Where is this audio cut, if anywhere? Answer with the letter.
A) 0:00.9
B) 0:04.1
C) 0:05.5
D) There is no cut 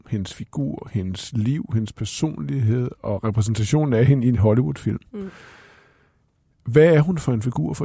D